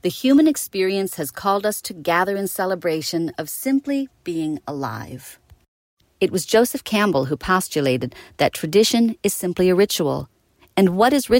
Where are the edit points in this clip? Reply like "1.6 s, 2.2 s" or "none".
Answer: 6.0 s